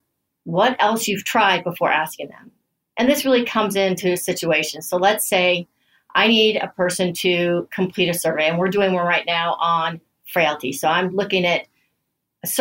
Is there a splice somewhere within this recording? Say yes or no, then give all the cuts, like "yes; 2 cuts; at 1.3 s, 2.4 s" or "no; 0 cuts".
no; 0 cuts